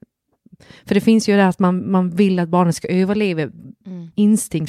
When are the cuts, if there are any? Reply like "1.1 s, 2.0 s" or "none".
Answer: none